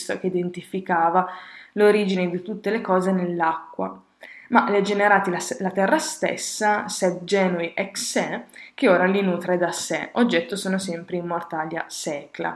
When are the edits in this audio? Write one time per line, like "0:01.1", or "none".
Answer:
none